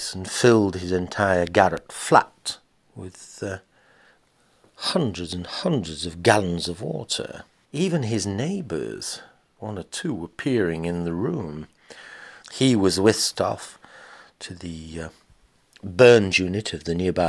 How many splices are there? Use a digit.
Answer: 2